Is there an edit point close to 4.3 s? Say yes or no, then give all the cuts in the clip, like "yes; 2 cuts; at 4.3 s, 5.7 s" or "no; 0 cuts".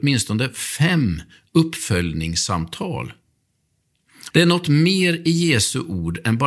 yes; 1 cut; at 4.3 s